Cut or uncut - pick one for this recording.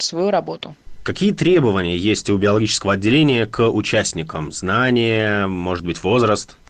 uncut